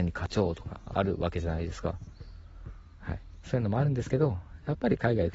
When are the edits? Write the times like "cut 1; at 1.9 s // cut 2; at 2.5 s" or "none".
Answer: cut 1; at 3.4 s